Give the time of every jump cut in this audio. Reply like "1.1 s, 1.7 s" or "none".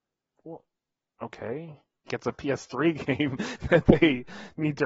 2.1 s

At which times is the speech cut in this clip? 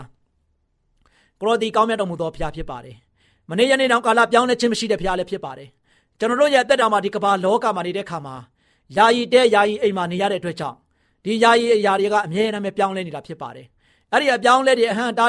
none

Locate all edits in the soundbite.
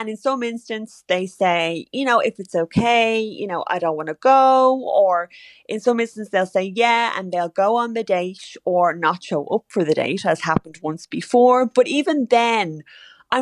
none

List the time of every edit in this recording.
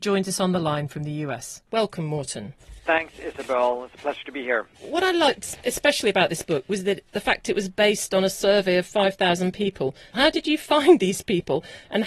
10.1 s

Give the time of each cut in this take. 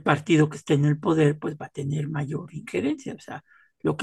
none

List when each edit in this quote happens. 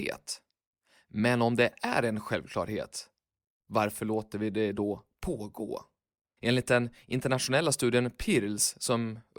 6.4 s

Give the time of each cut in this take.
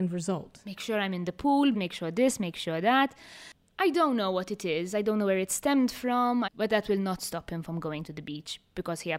1.7 s, 6.5 s

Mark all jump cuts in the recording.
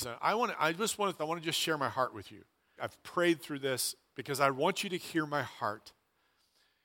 1.2 s, 2.8 s

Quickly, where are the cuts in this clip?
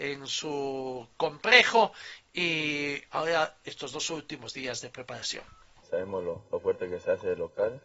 5.8 s

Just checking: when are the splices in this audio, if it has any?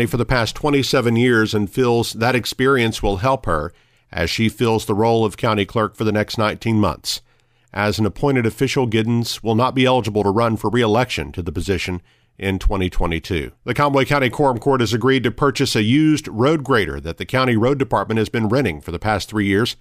13.5 s

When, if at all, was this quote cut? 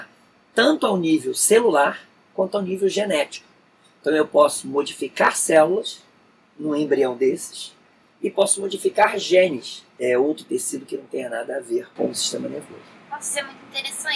10.0 s

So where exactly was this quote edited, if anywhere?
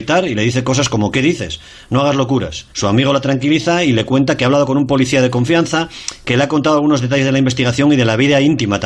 2.7 s

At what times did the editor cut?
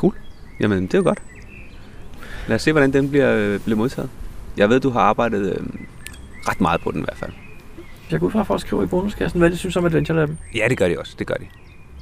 8.1 s

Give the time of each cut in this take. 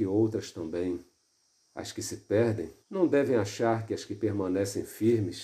1.6 s, 2.8 s

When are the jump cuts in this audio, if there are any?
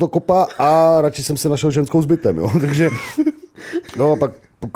none

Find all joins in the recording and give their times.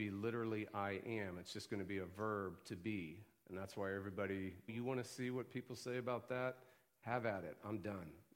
4.7 s

